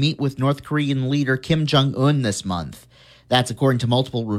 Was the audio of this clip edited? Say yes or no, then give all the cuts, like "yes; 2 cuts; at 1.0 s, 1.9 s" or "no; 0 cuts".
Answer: no; 0 cuts